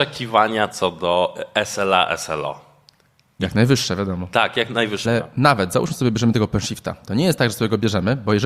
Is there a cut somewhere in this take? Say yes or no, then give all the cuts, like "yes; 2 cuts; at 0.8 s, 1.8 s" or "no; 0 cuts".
yes; 1 cut; at 5.0 s